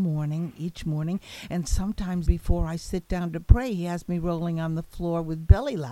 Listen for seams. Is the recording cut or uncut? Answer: cut